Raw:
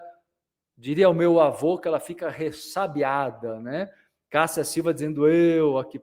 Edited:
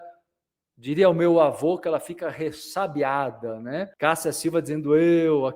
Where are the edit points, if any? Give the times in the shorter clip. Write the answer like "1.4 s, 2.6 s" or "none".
3.9 s